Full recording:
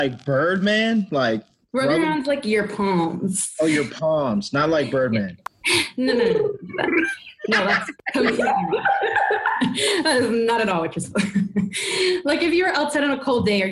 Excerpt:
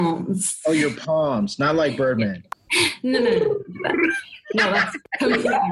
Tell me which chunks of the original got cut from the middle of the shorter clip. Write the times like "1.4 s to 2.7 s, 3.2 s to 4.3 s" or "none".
none